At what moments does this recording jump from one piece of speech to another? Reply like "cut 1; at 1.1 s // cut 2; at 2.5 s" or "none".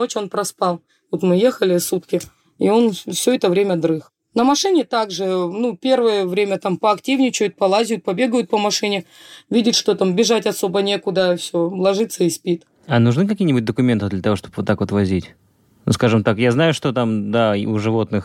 none